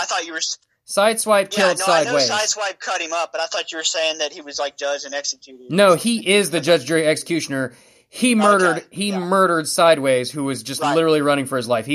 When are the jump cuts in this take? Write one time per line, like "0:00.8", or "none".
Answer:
none